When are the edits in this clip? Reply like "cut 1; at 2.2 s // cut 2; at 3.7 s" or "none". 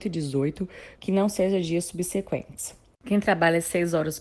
cut 1; at 0.9 s